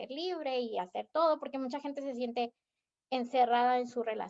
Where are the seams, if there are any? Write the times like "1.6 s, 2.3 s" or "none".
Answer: none